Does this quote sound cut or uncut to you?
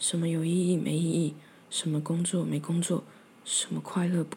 uncut